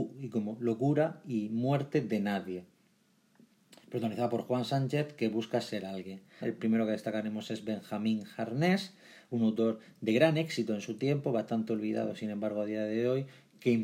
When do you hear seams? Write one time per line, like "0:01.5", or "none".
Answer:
0:06.4